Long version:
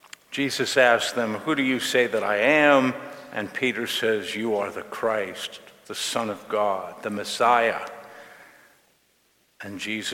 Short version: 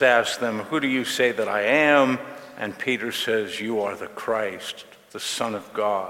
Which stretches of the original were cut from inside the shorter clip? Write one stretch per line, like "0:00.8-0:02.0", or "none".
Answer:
none